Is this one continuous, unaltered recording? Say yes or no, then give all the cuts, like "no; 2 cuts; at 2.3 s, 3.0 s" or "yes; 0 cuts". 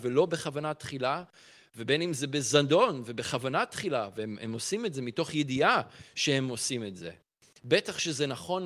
yes; 0 cuts